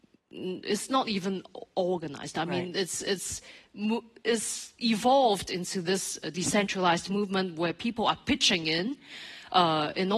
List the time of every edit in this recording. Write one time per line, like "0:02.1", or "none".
none